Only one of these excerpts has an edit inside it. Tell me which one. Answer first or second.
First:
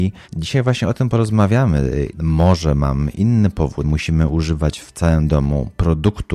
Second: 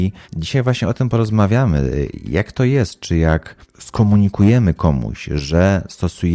first